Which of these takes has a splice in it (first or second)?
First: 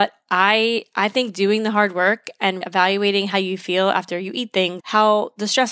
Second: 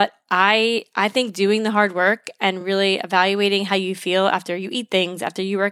first